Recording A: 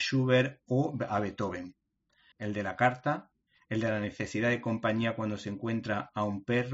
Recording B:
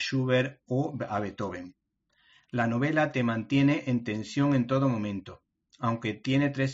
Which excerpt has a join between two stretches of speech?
A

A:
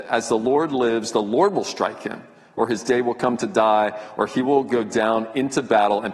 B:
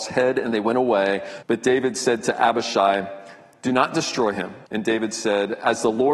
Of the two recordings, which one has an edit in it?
B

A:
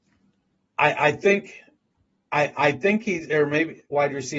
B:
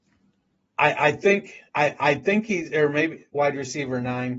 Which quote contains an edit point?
B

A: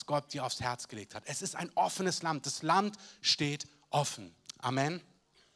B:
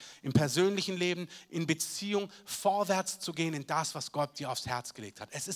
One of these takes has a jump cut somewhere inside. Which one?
B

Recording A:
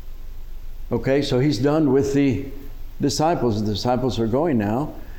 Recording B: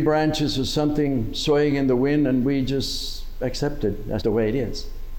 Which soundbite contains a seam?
B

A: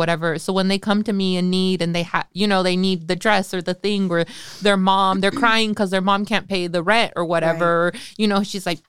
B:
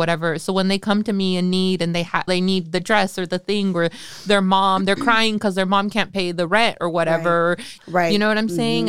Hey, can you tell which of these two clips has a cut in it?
B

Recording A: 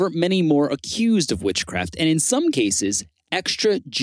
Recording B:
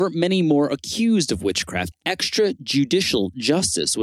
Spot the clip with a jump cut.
B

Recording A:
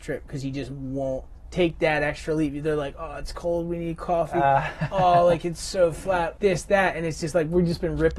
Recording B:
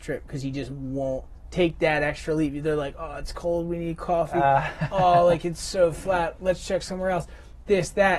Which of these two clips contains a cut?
A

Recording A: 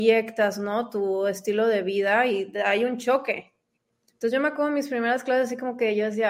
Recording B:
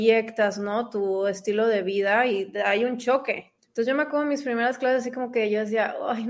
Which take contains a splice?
B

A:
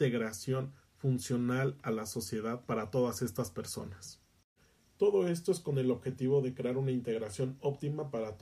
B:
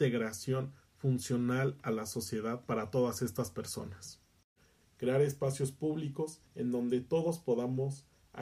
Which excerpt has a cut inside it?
B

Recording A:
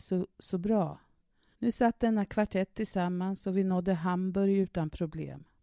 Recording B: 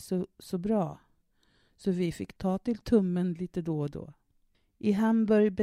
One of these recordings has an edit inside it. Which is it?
A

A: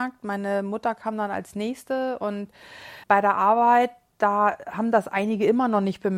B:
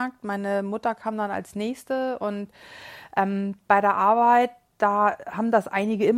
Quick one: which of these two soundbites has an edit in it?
A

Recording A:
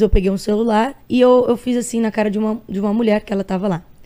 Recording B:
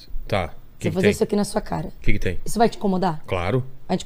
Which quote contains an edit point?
A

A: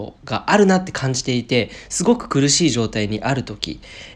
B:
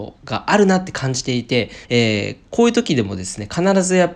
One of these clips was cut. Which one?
B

